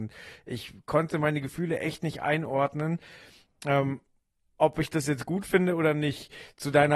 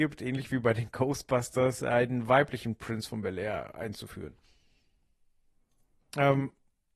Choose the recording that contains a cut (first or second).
second